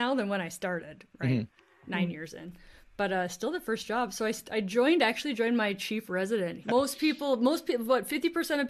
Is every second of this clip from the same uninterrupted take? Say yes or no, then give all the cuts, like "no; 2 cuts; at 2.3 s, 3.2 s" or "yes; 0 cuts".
no; 1 cut; at 6.6 s